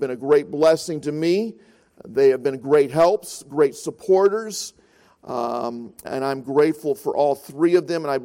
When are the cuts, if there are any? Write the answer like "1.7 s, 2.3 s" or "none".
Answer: 6.0 s